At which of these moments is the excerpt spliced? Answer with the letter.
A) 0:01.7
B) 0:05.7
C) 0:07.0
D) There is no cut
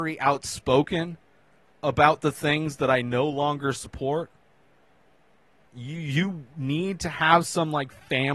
B